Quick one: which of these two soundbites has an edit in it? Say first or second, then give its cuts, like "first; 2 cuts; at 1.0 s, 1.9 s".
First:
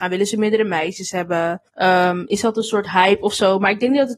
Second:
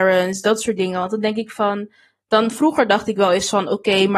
first; 1 cut; at 1.7 s